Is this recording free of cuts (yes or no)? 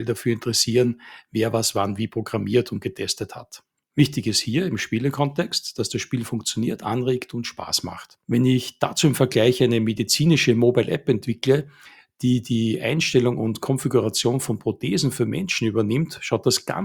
no